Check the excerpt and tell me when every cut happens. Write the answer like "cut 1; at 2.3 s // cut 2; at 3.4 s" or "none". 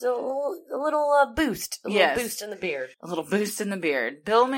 cut 1; at 2.9 s

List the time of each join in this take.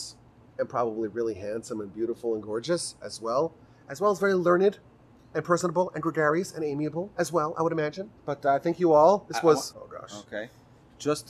cut 1; at 8.2 s // cut 2; at 9.7 s

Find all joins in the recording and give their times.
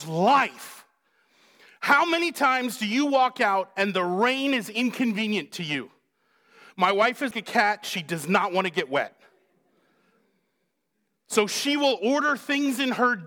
cut 1; at 7.3 s

